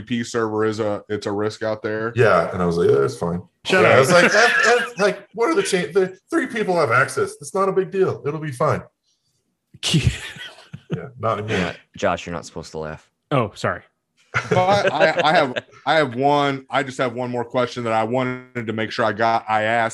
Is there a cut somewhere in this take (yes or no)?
yes